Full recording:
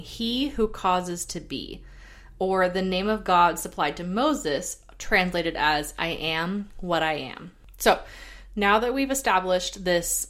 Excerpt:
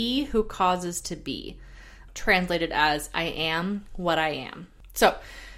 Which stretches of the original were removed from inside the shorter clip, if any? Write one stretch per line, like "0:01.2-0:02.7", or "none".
0:02.3-0:04.9

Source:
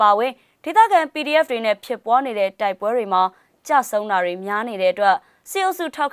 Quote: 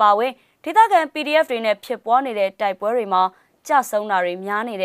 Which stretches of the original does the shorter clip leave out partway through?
none

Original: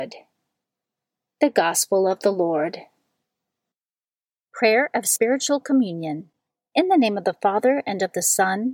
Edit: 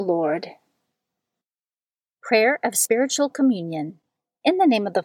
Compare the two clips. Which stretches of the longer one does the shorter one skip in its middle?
none

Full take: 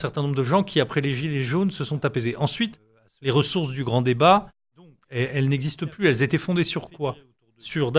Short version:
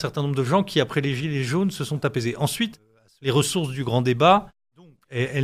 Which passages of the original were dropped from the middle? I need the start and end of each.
none

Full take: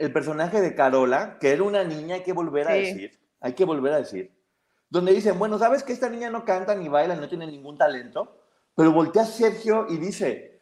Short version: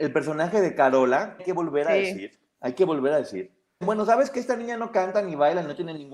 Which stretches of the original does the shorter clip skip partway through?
0:01.4-0:02.2
0:04.6-0:05.3

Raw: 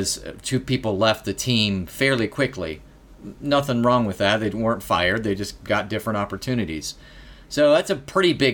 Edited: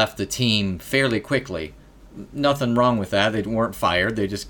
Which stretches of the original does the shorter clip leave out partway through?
none

